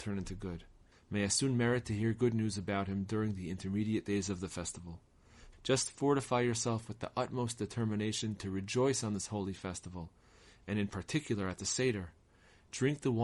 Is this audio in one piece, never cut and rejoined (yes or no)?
no